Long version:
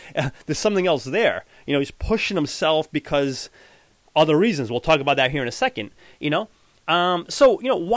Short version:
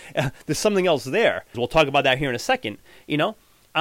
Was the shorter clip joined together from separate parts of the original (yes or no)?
yes